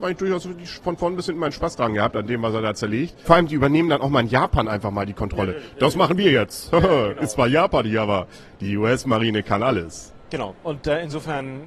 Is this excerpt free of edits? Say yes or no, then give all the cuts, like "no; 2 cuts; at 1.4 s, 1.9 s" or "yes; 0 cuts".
no; 1 cut; at 3.2 s